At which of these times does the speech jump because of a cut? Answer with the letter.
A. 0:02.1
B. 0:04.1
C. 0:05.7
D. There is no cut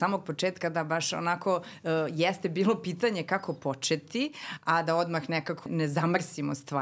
C